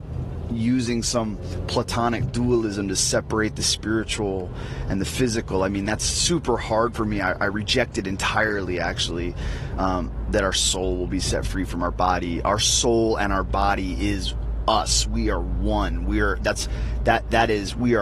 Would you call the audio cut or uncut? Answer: uncut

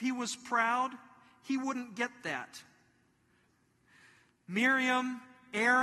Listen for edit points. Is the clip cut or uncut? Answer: cut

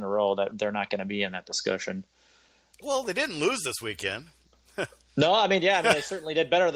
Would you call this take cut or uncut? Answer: uncut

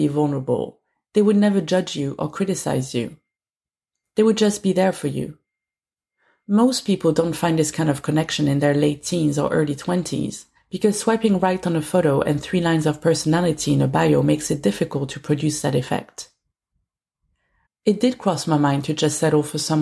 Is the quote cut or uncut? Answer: cut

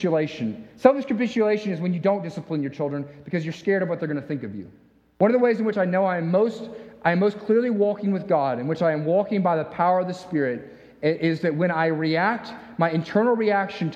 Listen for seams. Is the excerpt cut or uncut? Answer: cut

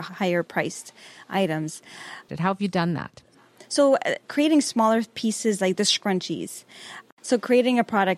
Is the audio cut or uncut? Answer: cut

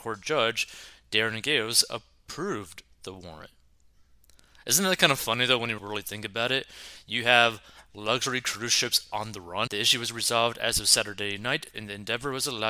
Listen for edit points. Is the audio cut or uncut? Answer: cut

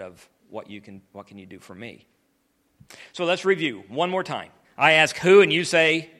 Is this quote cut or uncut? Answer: cut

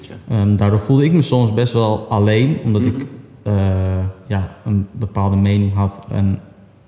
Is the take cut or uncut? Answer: uncut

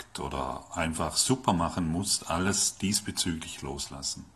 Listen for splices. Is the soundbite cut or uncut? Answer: uncut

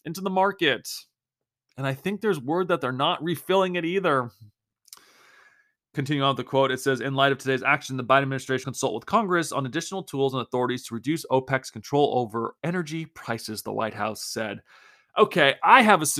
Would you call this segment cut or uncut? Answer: cut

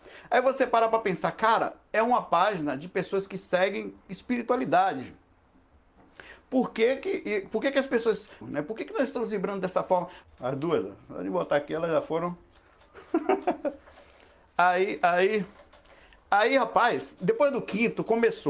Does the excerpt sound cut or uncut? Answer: cut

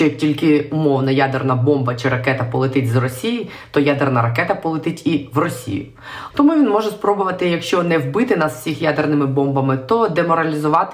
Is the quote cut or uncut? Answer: cut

